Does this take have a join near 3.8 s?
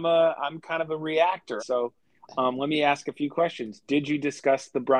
no; 1 cut; at 1.6 s

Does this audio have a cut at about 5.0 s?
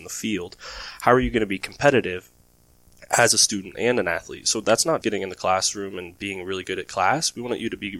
yes; 1 cut; at 5.0 s

